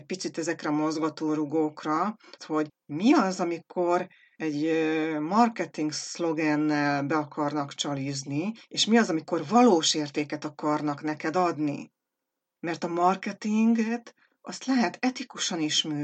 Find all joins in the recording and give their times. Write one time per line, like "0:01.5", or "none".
0:02.4